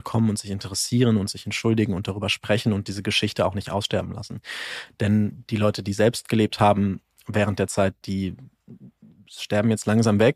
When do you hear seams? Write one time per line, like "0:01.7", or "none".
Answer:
none